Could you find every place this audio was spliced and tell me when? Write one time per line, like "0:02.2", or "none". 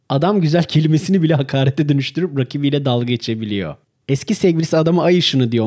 0:04.0